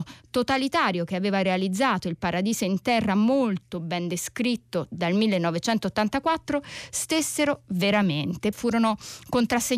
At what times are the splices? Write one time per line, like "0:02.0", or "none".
0:08.5